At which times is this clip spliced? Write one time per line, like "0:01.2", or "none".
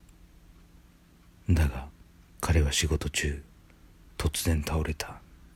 0:02.3